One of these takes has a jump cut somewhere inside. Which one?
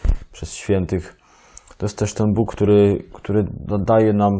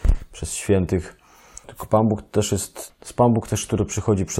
second; 2 cuts; at 1.6 s, 2.9 s

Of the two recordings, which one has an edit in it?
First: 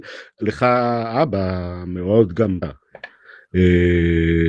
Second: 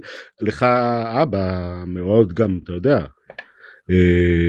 first; 1 cut; at 2.6 s

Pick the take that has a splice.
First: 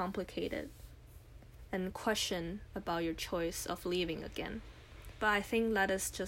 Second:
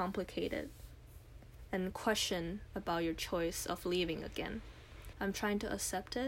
second; 1 cut; at 5.1 s

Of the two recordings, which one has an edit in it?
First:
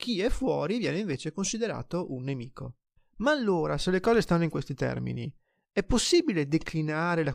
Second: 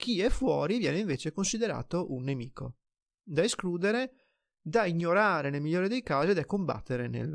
first; 1 cut; at 3.0 s

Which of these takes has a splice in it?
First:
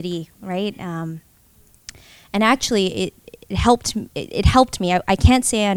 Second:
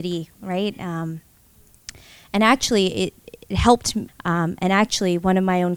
second; 1 cut; at 4.1 s

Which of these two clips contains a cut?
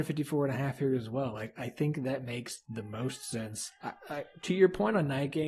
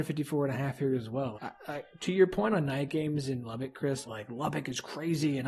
second; 2 cuts; at 1.3 s, 4.0 s

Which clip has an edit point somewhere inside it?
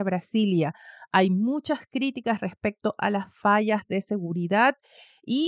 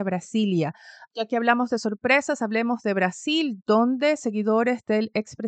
second; 1 cut; at 1.1 s

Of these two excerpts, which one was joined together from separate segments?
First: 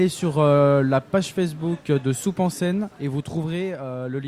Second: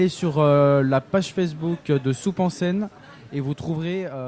first; 1 cut; at 2.9 s

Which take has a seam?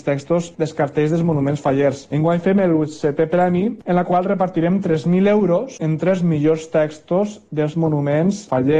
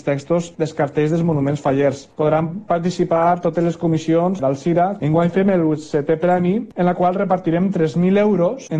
first; 1 cut; at 2.1 s

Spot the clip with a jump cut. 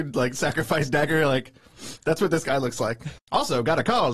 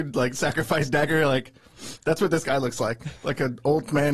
first; 1 cut; at 3.2 s

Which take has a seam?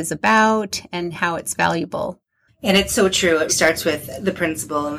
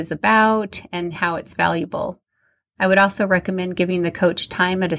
first; 2 cuts; at 2.5 s, 3.5 s

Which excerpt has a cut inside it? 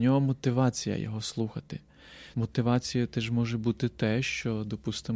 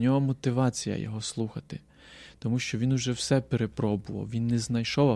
first; 1 cut; at 2.3 s

